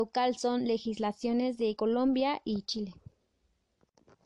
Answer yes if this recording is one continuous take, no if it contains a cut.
no